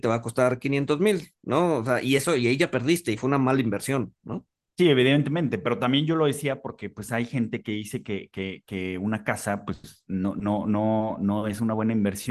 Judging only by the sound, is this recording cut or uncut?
uncut